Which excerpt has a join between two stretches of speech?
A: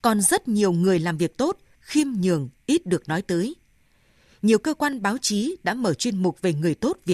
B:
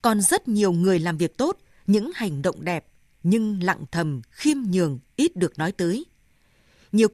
A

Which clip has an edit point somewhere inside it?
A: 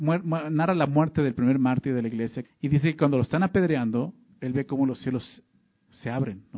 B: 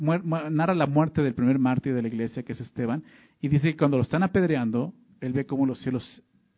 A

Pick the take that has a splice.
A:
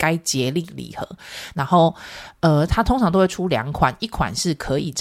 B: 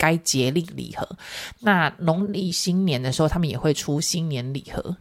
A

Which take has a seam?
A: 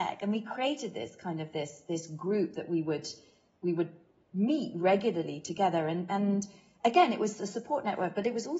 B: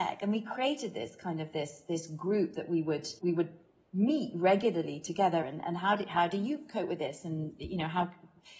B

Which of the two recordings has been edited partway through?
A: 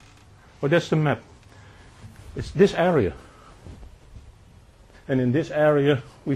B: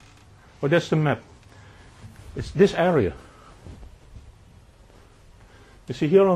A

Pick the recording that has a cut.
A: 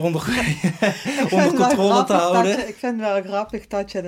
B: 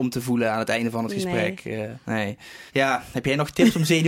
B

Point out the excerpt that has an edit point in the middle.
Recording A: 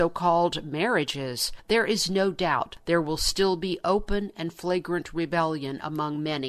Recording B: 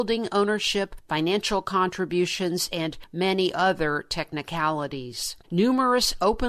B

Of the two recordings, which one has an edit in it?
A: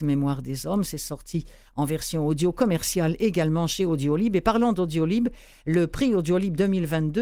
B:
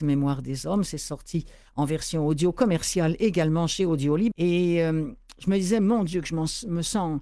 B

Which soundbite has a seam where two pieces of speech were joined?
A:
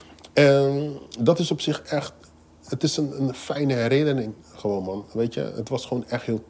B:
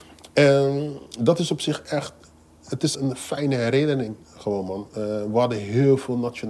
B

